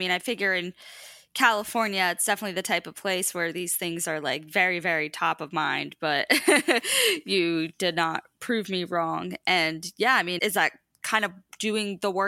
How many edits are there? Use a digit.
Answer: 1